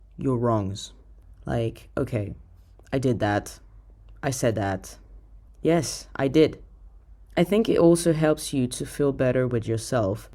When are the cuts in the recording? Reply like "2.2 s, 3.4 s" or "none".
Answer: 5.5 s